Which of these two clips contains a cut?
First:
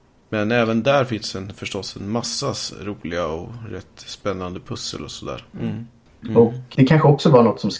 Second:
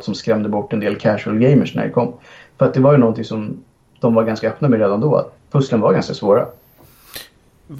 first; 2 cuts; at 5.5 s, 6.8 s

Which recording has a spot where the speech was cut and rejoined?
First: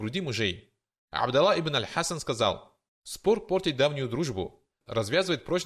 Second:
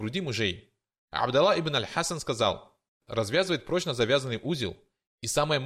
second; 1 cut; at 3.0 s

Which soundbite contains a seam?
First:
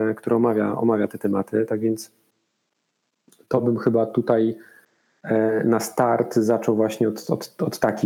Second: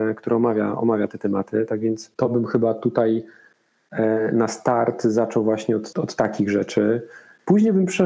second; 2 cuts; at 2.1 s, 5.9 s

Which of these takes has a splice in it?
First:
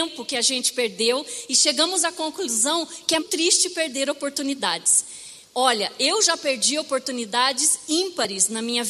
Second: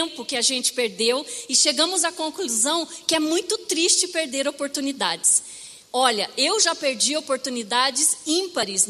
first; 1 cut; at 3.2 s

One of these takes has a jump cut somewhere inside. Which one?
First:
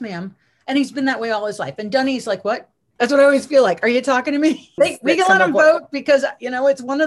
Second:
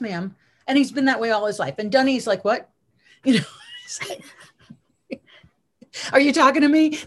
first; 2 cuts; at 3.0 s, 4.8 s

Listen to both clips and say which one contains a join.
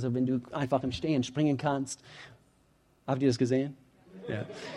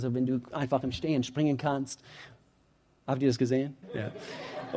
second; 1 cut; at 3.8 s

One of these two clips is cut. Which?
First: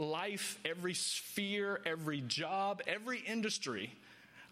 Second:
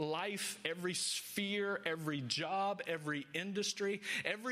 first; 1 cut; at 2.8 s

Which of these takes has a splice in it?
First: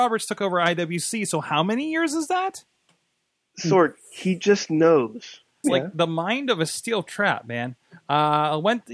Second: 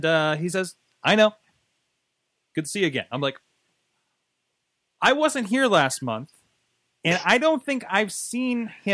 first; 1 cut; at 5.6 s

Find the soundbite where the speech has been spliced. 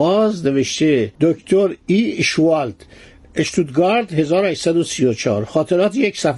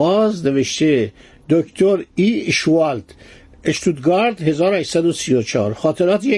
first; 1 cut; at 1.1 s

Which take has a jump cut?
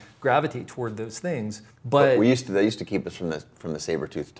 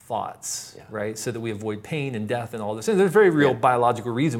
first; 1 cut; at 1.7 s

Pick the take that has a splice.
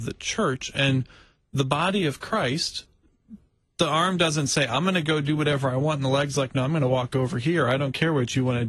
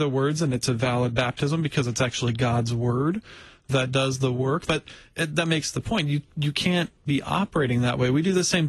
second; 1 cut; at 4.7 s

